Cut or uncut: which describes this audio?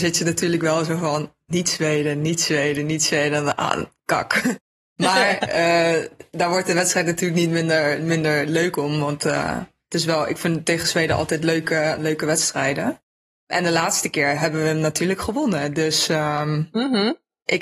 uncut